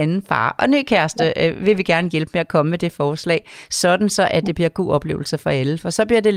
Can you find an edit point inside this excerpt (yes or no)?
no